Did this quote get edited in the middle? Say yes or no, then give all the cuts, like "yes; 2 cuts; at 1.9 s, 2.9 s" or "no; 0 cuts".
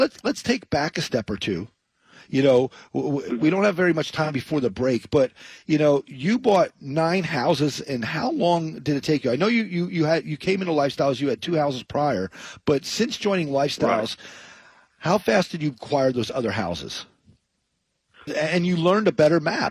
yes; 1 cut; at 18.3 s